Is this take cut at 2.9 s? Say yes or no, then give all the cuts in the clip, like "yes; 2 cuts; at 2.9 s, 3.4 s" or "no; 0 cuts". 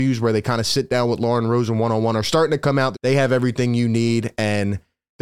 yes; 1 cut; at 2.9 s